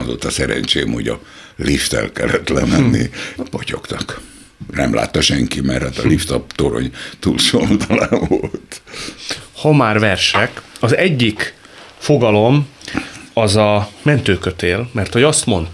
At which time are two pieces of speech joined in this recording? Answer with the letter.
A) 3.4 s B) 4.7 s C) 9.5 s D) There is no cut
A